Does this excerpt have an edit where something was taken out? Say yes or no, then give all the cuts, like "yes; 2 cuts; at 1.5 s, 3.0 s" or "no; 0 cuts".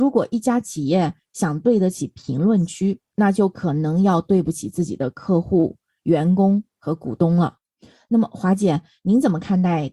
no; 0 cuts